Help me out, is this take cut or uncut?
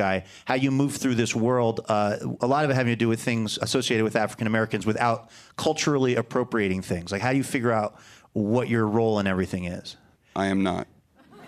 cut